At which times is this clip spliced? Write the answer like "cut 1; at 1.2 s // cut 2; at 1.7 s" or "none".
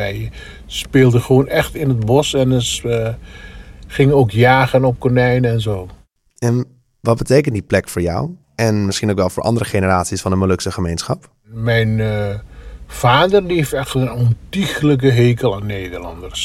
cut 1; at 8.4 s